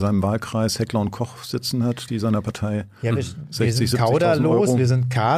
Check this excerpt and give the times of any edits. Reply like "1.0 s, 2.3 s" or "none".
none